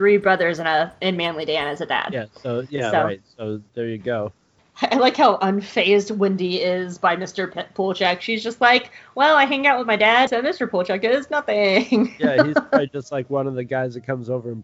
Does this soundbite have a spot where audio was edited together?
yes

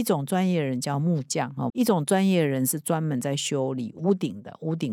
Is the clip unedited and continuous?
no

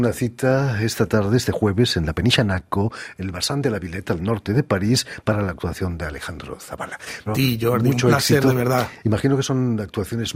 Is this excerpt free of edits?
no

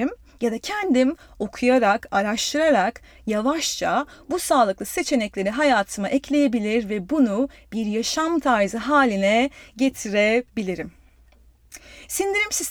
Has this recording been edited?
no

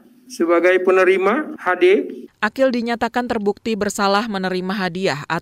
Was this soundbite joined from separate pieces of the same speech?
yes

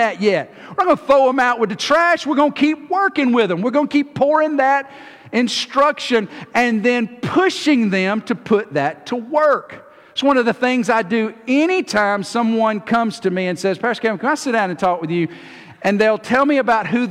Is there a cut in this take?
no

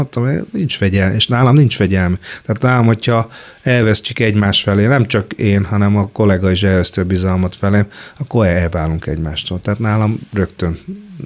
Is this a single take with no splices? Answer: yes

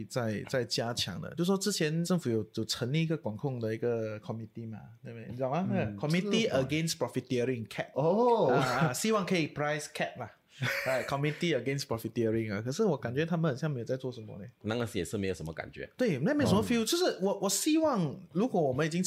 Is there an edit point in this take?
no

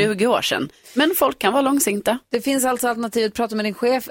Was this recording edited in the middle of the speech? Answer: no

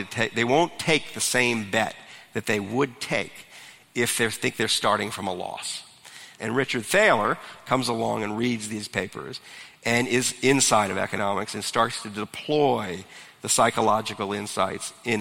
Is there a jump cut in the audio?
yes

